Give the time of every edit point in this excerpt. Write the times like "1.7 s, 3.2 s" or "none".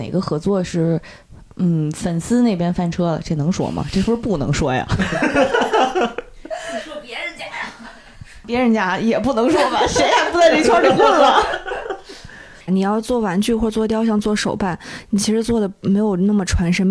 12.7 s